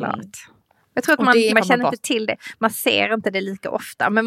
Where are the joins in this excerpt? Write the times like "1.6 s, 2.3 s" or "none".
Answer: 1.5 s